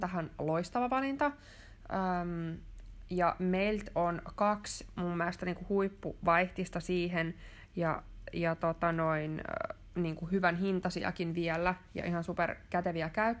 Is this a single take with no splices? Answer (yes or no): yes